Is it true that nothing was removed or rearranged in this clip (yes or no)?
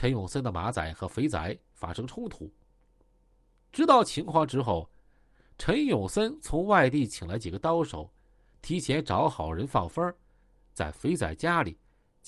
yes